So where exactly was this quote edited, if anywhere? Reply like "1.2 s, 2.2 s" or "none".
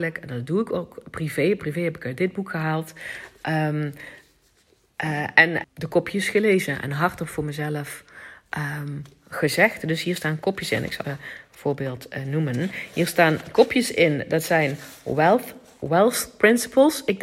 5.6 s, 11.0 s